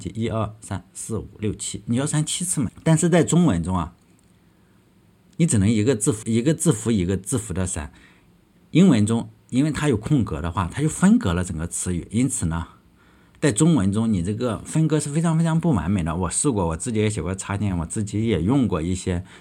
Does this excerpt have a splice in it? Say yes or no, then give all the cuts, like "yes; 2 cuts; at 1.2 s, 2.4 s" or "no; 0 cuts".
yes; 2 cuts; at 2.7 s, 6.2 s